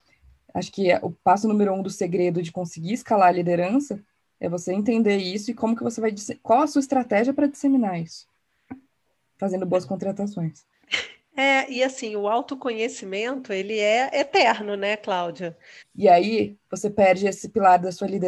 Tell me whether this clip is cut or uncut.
cut